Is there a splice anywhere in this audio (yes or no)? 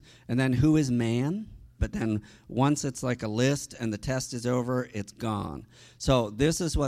yes